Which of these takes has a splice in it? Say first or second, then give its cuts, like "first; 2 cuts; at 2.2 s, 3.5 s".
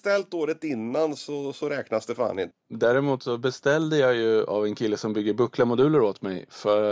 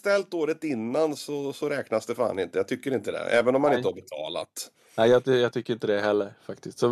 first; 1 cut; at 2.5 s